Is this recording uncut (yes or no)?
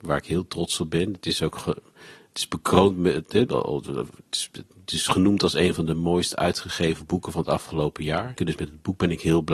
no